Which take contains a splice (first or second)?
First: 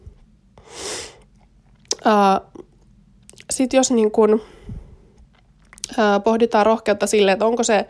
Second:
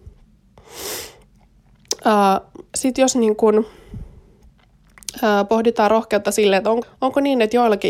second